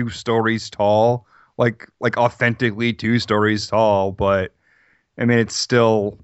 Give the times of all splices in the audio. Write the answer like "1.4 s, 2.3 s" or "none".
none